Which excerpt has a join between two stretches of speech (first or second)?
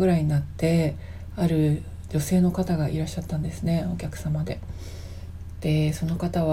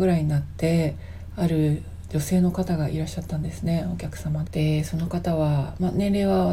second